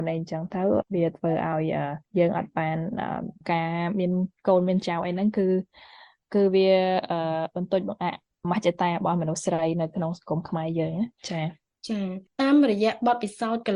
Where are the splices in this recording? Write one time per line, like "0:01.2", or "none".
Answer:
none